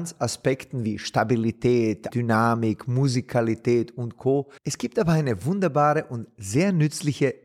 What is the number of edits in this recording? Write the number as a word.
two